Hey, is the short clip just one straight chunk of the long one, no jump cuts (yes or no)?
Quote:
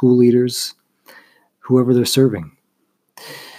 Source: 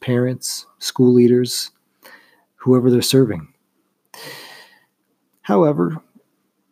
yes